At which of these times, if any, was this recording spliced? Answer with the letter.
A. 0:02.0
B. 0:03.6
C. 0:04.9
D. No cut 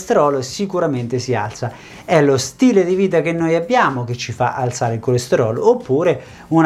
D